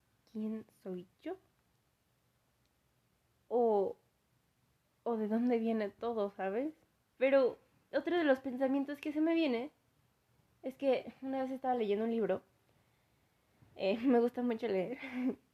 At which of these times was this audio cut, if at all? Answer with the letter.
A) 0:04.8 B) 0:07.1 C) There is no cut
B